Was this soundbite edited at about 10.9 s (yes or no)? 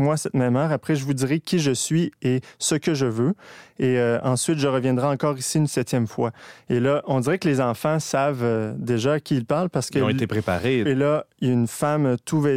yes